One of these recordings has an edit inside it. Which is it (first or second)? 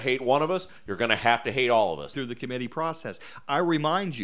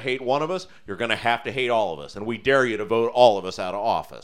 first